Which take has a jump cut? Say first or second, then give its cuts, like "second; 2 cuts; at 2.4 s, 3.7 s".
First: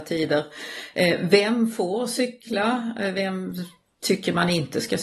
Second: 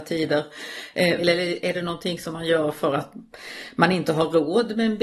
second; 1 cut; at 1.2 s